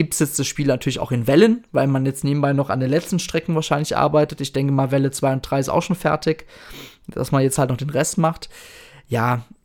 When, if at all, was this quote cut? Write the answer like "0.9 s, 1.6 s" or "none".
none